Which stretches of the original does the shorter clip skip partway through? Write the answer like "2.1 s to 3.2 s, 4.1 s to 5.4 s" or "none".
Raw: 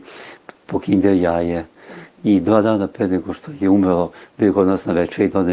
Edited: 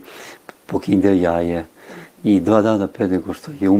none